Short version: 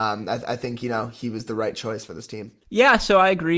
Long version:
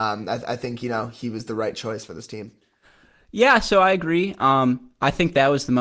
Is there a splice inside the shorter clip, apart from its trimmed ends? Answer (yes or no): yes